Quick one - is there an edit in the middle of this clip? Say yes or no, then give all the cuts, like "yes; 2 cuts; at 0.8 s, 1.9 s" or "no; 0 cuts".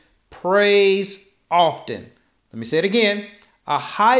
no; 0 cuts